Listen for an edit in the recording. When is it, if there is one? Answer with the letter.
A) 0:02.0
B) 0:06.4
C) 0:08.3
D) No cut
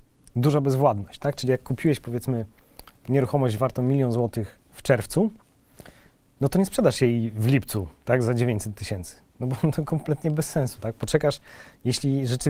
D